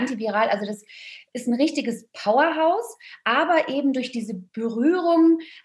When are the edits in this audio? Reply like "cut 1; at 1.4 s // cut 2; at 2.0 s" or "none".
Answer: none